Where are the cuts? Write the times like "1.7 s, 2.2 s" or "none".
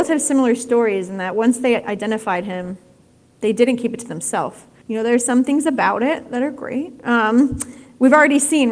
4.8 s